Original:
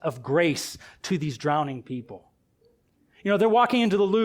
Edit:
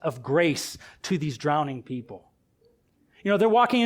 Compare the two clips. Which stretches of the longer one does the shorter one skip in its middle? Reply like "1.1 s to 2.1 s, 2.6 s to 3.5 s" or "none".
none